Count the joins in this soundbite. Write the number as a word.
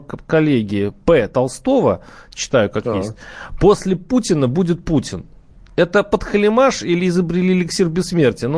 zero